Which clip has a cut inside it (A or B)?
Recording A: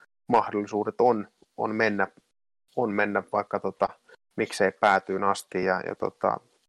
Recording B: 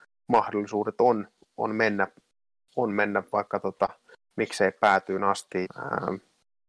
B